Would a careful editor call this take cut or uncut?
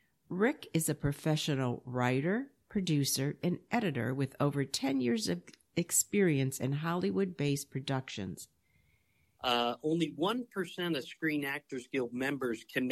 cut